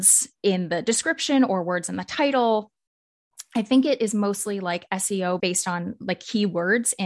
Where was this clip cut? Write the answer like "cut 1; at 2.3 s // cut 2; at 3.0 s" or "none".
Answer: cut 1; at 5.4 s